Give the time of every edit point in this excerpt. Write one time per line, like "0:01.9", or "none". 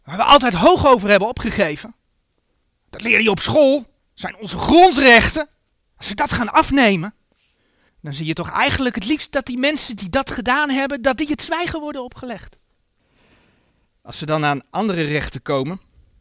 none